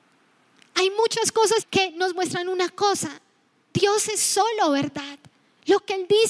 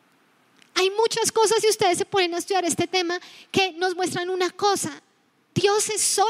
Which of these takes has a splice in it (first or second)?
first